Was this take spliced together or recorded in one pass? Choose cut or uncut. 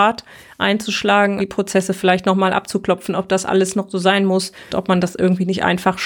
cut